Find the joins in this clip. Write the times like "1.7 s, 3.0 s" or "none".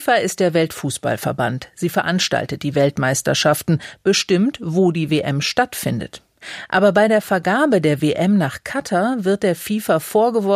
none